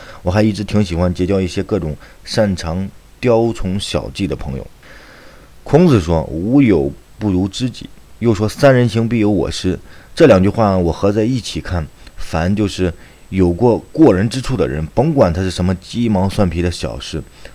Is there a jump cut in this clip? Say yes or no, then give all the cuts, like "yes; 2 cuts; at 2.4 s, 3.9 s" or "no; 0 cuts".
no; 0 cuts